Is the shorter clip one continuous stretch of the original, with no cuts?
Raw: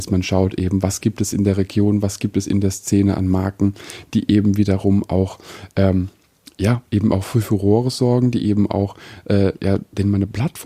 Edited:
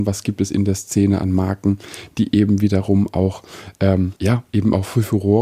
no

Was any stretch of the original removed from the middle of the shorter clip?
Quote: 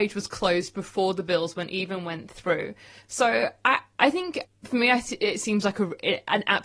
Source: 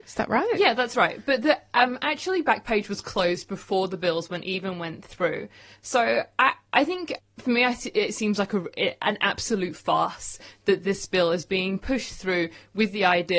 no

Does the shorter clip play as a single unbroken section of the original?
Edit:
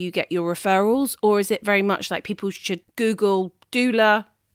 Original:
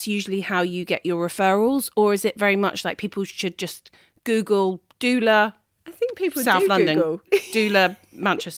no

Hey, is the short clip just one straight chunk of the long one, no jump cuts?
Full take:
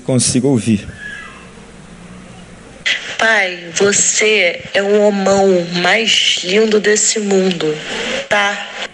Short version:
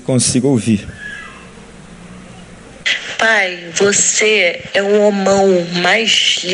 yes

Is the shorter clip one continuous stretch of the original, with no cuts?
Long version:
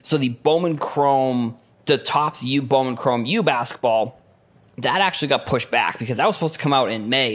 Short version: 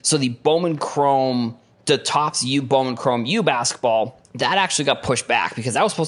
no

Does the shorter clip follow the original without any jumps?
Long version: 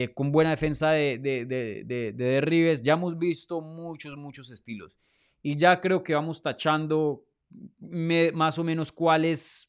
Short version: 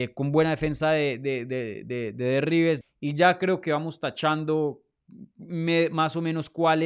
no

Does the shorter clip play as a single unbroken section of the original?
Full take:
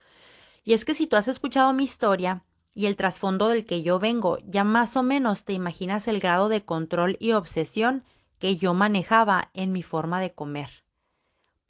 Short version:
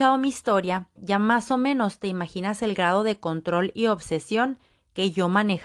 no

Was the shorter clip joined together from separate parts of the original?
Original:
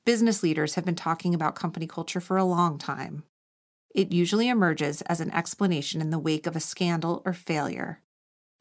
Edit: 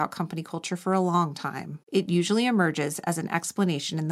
yes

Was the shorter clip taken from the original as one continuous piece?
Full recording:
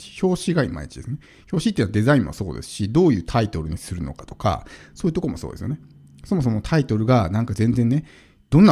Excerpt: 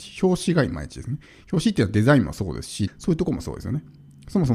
no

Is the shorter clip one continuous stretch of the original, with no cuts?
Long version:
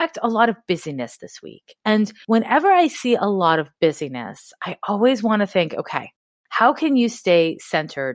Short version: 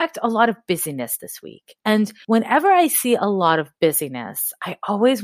yes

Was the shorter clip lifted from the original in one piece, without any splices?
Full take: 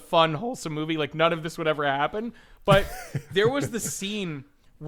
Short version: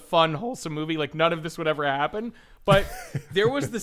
yes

